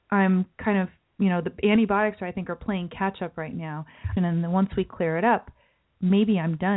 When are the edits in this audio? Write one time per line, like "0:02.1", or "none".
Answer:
0:04.2